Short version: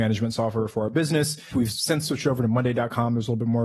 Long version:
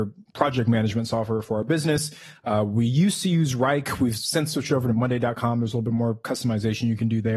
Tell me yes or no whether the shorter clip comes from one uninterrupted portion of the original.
no